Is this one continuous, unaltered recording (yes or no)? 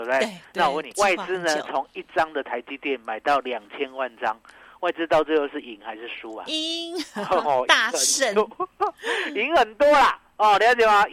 no